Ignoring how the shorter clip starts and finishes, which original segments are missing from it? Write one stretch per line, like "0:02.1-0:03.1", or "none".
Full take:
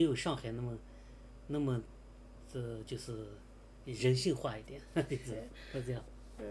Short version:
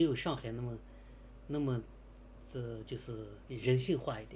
0:03.4-0:03.8

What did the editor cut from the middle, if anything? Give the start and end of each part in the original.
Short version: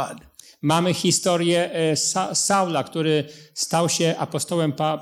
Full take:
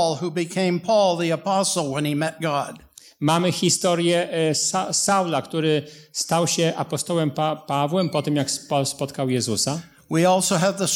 none

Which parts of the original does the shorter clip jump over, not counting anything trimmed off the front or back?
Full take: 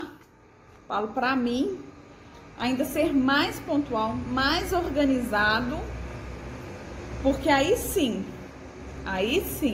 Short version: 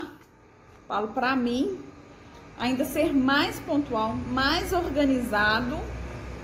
none

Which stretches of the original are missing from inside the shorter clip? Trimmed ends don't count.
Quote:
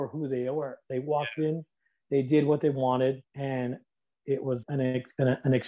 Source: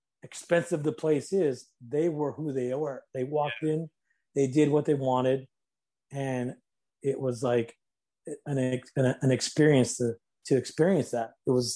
0:05.5-0:06.0
0:07.4-0:08.4

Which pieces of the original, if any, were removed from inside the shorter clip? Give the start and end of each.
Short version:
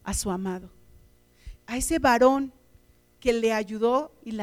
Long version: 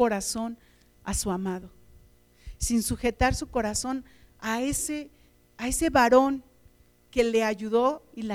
0:02.6-0:05.5

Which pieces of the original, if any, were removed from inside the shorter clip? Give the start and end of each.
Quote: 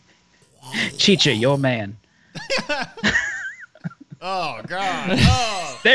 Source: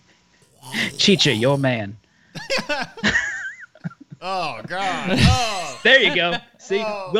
none

